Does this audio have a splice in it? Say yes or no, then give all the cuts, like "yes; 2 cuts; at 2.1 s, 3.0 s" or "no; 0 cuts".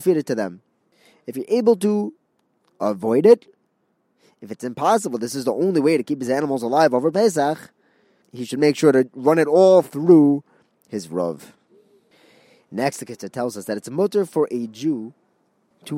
no; 0 cuts